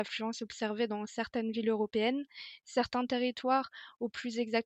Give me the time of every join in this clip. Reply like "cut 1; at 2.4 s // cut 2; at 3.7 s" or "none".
none